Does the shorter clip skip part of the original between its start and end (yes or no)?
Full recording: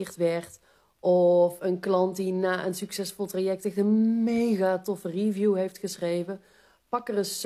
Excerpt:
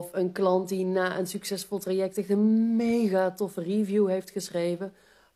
no